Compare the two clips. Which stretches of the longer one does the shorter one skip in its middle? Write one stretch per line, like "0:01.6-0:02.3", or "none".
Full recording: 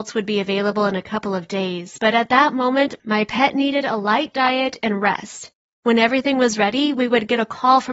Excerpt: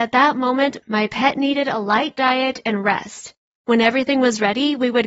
none

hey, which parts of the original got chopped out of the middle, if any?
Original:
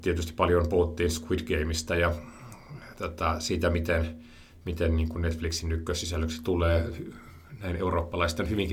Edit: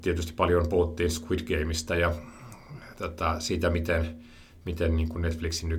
none

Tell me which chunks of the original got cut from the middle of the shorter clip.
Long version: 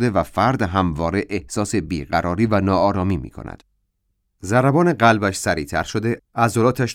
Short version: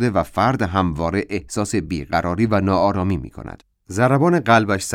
0:03.7-0:04.3

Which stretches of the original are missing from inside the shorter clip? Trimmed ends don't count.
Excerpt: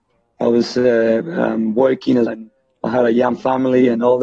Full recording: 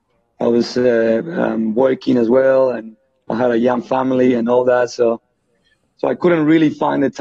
0:02.3-0:02.7

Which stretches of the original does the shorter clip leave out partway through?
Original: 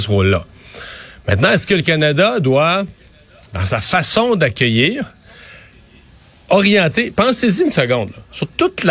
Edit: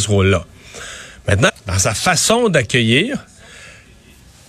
0:01.5-0:03.3

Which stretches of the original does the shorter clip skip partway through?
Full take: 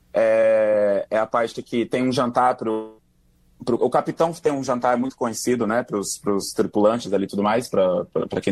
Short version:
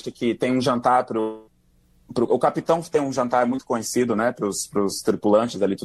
none

